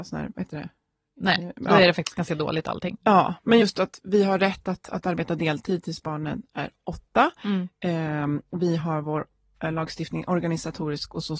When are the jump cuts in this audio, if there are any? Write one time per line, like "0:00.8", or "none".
none